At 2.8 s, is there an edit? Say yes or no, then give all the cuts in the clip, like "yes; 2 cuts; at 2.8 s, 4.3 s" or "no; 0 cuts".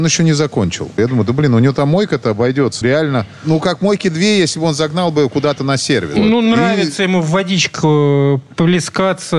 yes; 1 cut; at 2.8 s